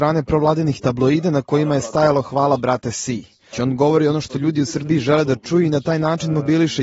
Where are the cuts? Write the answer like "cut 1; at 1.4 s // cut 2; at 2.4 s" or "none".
cut 1; at 3.5 s

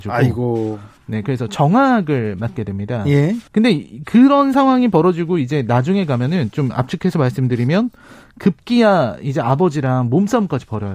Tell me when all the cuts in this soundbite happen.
cut 1; at 3.5 s

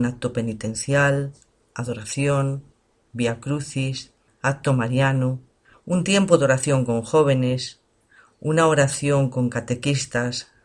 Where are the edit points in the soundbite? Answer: none

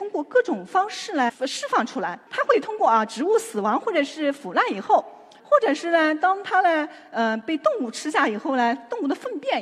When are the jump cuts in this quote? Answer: cut 1; at 2.3 s // cut 2; at 5.4 s

